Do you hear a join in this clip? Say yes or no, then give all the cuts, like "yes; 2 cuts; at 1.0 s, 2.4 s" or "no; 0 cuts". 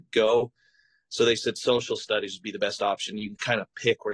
no; 0 cuts